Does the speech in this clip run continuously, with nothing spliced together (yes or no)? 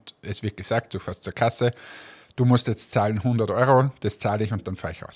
yes